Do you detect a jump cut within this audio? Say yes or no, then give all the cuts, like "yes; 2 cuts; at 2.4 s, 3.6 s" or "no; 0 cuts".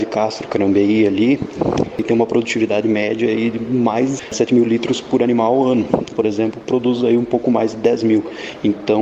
yes; 1 cut; at 6.1 s